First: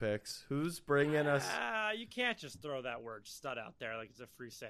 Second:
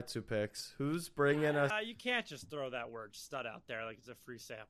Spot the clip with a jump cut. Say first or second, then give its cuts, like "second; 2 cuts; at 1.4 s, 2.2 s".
second; 1 cut; at 1.7 s